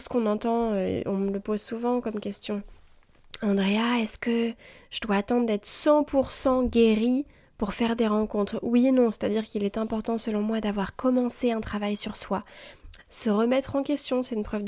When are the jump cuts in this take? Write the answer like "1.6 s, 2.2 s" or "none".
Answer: 13.0 s